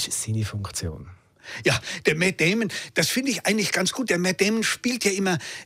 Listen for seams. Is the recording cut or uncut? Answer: uncut